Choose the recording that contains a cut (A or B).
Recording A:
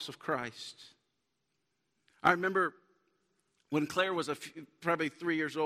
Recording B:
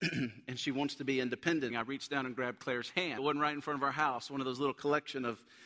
B